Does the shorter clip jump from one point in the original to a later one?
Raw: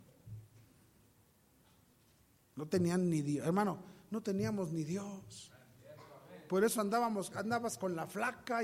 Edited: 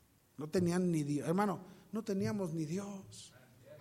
no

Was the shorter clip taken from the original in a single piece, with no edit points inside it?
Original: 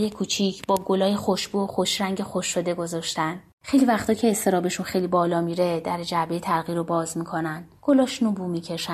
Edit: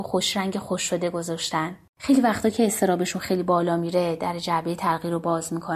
yes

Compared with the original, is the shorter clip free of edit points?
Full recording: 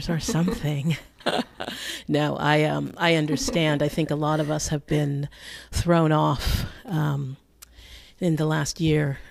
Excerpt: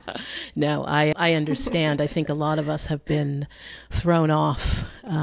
no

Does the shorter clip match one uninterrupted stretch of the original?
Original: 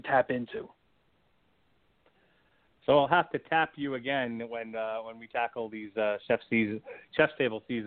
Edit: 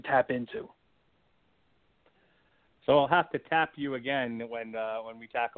yes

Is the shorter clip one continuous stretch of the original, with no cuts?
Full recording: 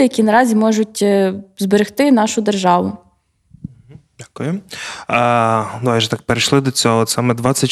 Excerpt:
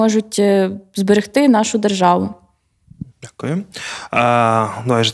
no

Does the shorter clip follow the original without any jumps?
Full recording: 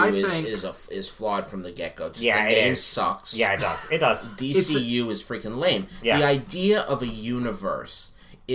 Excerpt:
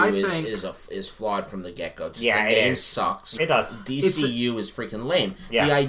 no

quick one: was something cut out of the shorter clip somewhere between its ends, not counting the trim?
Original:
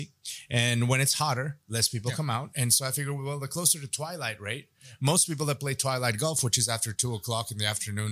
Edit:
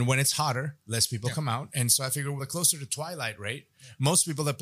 yes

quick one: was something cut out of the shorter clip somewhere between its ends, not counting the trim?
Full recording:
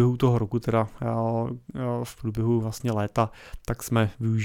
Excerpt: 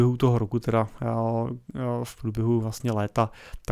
no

